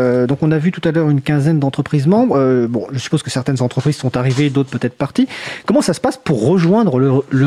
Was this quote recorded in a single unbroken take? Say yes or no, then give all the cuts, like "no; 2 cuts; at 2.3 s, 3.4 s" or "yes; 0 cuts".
yes; 0 cuts